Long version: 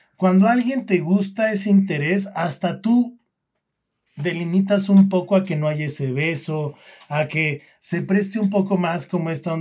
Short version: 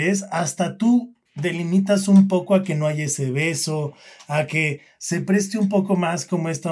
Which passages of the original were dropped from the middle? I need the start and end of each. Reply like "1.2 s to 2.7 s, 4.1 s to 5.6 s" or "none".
3.3 s to 4.1 s